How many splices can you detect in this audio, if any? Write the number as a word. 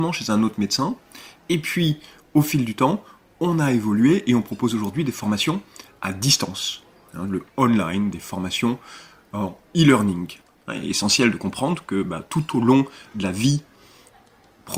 one